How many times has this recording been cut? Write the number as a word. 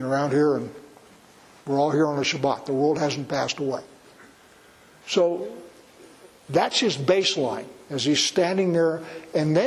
zero